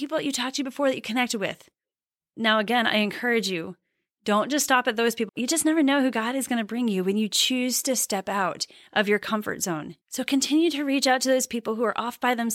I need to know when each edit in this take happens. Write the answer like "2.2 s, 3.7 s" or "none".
5.3 s, 10.0 s